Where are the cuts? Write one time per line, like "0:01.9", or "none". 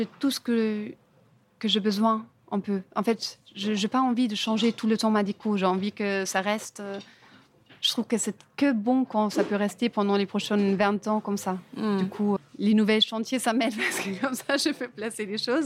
0:12.4